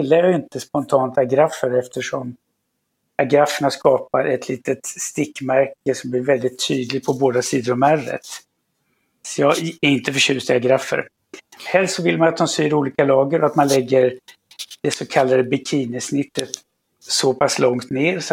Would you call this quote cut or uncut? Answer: uncut